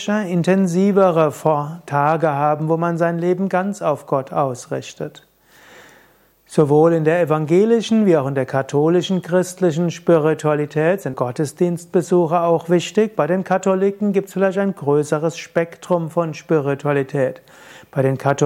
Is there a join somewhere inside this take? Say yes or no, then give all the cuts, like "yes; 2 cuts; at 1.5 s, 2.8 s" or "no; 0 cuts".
yes; 1 cut; at 11.1 s